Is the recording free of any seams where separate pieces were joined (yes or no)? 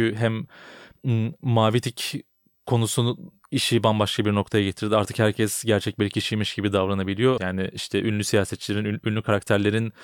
no